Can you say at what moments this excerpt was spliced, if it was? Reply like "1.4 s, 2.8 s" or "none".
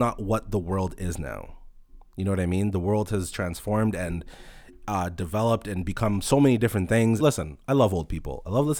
7.2 s